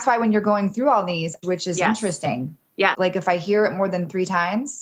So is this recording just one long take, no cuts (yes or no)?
no